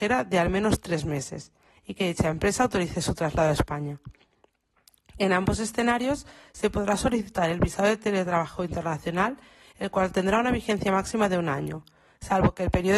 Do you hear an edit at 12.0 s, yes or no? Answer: no